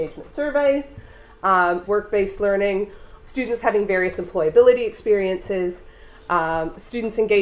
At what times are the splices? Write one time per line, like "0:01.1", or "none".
0:01.8
0:03.2